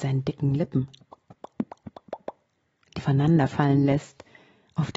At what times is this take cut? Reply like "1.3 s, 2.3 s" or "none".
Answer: 3.0 s